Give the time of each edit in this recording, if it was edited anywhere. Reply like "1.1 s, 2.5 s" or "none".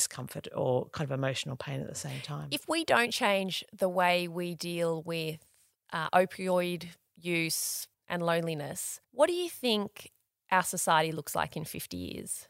7.9 s, 9.0 s